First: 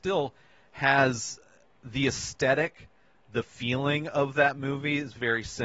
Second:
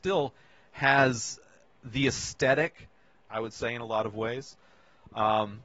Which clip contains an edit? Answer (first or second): second